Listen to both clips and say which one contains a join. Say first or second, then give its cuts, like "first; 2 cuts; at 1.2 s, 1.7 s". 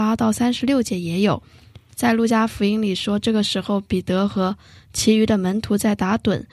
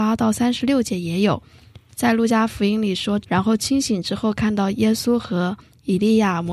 second; 1 cut; at 3.2 s